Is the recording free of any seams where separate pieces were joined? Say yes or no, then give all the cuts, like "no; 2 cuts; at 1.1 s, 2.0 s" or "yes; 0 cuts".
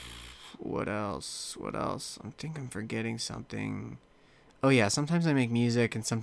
yes; 0 cuts